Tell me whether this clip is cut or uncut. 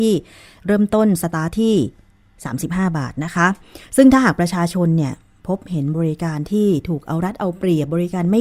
cut